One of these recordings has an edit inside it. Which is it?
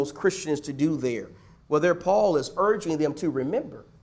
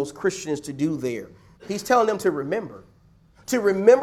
second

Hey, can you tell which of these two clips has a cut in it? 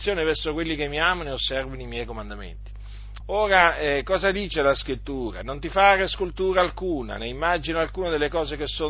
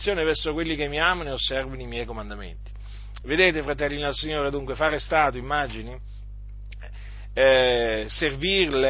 first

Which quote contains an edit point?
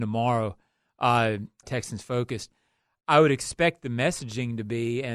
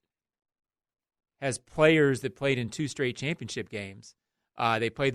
first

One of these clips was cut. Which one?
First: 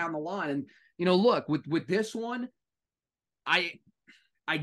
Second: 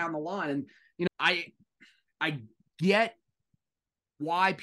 second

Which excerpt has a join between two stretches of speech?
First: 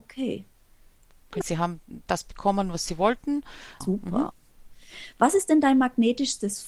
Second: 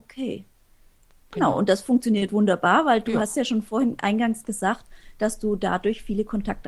first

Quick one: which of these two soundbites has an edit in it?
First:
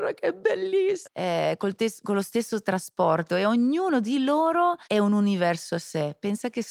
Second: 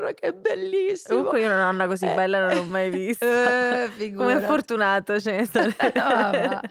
first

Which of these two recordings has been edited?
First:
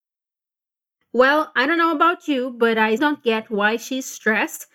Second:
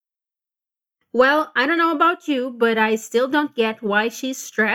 first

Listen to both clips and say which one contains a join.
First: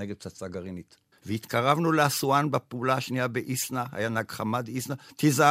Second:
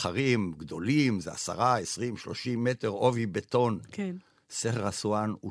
first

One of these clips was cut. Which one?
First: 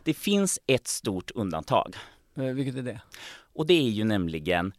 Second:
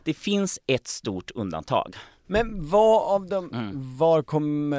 second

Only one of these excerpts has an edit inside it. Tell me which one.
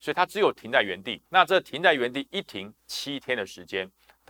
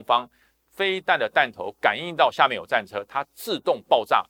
first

